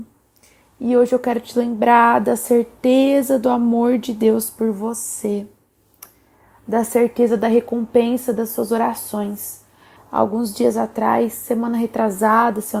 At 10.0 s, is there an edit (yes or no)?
yes